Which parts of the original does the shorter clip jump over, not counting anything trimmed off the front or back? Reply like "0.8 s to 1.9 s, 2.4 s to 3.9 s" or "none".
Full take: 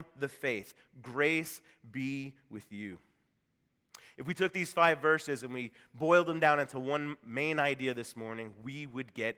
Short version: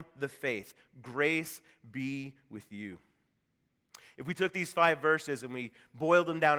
none